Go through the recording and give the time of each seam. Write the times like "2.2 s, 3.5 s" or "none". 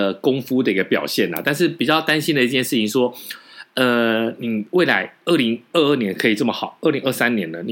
none